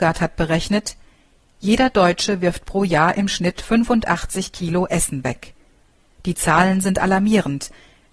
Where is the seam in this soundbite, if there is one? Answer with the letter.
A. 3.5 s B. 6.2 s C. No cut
B